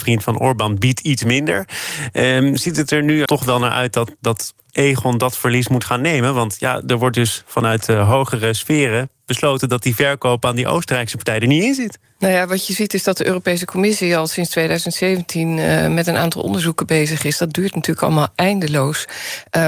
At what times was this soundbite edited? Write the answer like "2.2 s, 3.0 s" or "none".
3.3 s